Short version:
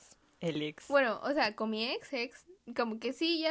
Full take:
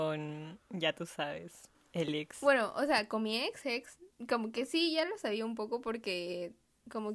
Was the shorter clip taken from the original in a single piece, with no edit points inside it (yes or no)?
yes